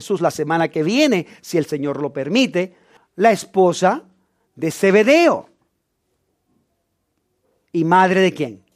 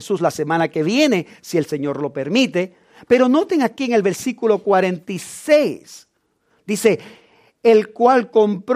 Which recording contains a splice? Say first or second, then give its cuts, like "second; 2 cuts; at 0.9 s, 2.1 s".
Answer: first; 1 cut; at 3.0 s